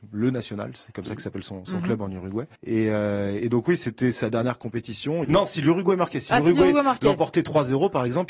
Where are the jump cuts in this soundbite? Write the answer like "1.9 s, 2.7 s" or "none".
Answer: 2.6 s, 5.2 s